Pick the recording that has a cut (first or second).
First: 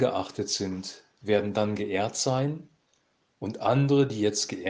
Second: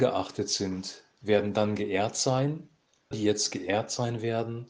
second